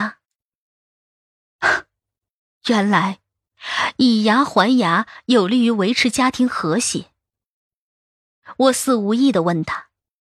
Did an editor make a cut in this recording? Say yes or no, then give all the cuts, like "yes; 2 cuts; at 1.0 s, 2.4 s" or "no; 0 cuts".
no; 0 cuts